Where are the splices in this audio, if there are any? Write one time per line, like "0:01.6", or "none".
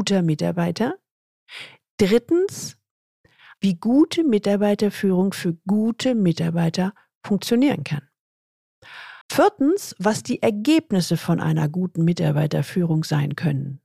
0:03.6
0:09.2